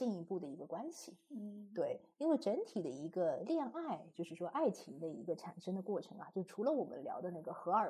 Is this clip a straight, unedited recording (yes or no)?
yes